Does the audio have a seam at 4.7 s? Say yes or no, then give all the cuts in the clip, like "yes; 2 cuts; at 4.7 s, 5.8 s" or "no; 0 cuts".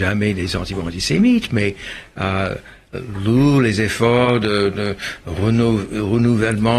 no; 0 cuts